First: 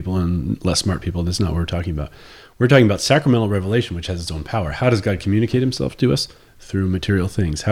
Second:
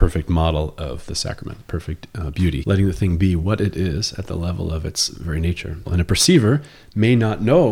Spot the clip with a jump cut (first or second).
second